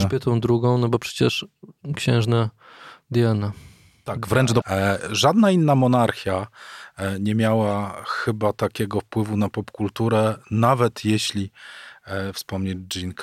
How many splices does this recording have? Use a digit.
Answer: 1